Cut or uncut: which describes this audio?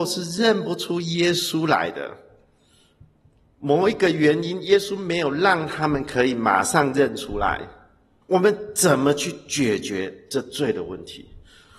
cut